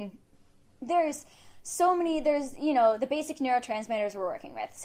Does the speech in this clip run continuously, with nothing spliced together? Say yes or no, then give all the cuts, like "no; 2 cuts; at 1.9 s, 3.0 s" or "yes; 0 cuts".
yes; 0 cuts